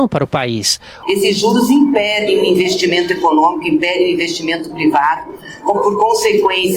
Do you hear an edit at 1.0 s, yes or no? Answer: yes